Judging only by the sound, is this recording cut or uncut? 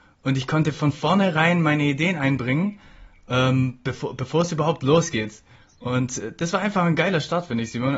uncut